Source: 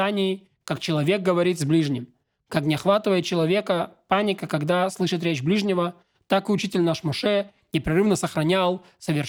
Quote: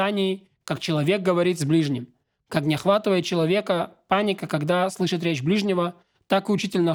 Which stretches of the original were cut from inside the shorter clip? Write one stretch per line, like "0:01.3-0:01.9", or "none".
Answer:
none